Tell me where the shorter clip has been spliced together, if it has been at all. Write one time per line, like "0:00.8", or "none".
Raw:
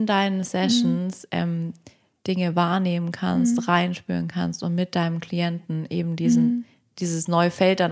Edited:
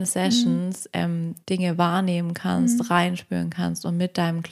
0:01.4